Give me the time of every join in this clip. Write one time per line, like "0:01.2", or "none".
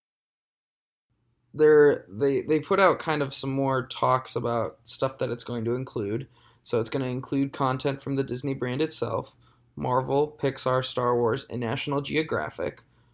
none